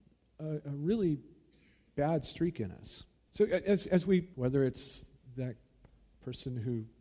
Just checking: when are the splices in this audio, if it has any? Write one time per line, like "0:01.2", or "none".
0:03.3
0:04.3